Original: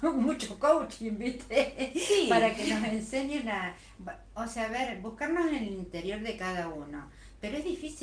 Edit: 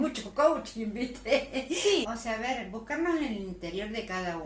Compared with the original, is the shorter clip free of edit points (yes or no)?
no